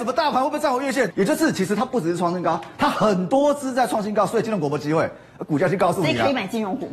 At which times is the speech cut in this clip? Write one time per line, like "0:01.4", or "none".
0:01.1